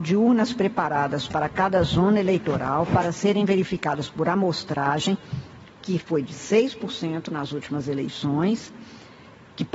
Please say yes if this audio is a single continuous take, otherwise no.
yes